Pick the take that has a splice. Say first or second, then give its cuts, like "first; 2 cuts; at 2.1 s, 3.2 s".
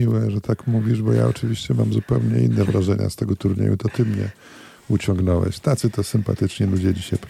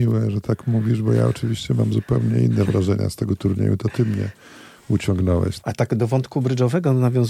second; 1 cut; at 5.6 s